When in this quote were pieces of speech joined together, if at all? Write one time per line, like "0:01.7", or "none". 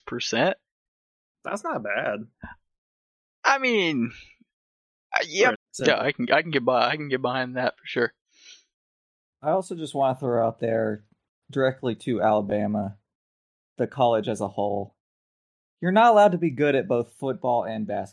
0:05.5